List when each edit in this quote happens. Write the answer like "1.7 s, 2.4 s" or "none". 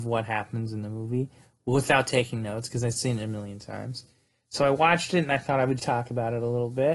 5.8 s